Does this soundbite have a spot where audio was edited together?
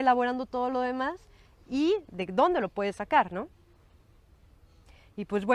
no; 0 cuts

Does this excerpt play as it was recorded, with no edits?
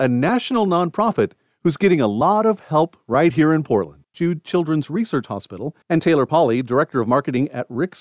no; 2 cuts; at 4.1 s, 5.8 s

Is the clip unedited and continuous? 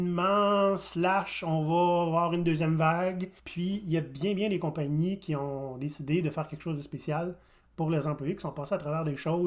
no; 1 cut; at 3.4 s

